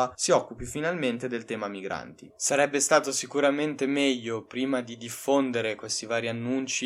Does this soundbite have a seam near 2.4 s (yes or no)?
no